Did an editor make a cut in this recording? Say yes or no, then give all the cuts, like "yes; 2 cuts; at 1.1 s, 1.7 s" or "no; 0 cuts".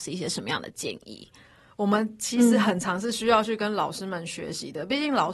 yes; 1 cut; at 1.7 s